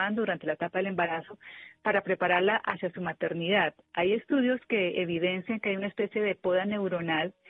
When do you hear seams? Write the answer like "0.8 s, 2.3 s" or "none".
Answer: none